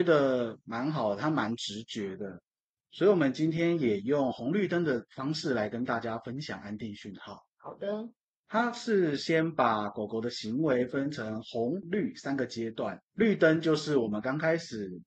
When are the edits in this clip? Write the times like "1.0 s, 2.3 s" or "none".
11.8 s, 13.0 s